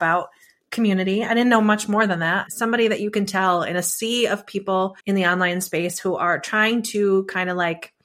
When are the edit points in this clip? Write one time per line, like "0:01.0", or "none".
0:02.5
0:05.0